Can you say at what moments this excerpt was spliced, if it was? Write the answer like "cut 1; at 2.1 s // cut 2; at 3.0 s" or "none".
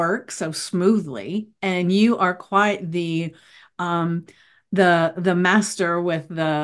none